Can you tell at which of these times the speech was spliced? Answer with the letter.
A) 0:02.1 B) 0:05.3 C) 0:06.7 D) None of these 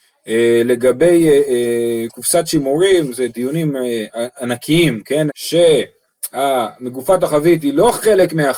B